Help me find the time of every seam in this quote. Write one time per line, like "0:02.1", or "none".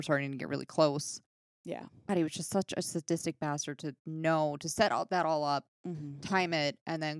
0:02.1